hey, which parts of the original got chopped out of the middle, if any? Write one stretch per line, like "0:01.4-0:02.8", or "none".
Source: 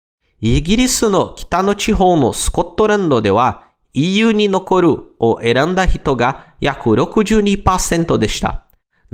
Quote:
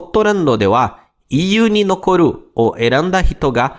none